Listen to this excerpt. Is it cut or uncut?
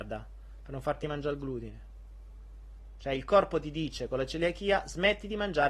uncut